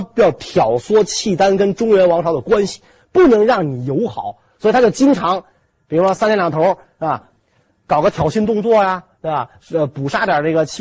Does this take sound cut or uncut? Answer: uncut